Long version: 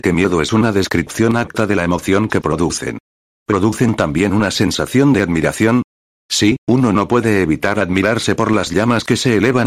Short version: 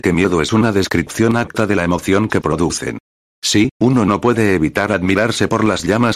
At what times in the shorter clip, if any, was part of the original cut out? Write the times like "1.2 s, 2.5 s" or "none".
3.3 s